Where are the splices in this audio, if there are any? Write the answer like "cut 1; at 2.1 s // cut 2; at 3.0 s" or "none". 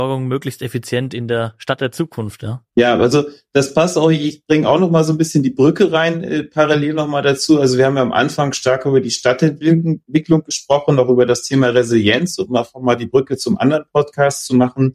cut 1; at 2.7 s